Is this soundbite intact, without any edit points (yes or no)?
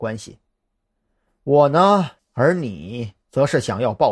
no